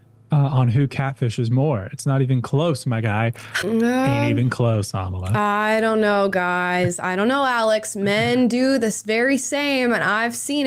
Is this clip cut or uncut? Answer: cut